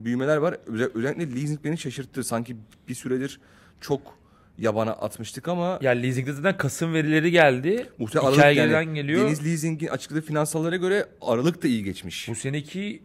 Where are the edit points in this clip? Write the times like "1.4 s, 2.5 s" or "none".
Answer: none